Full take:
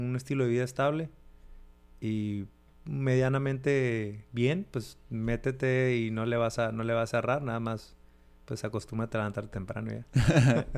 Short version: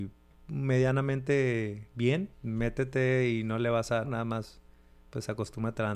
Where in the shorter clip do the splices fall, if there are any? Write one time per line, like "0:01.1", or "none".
0:02.3
0:04.0